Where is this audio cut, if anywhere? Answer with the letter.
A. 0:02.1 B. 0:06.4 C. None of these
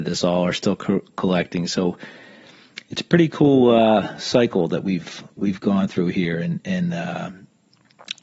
C